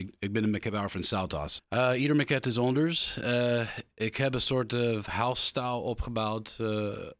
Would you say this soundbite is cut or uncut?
cut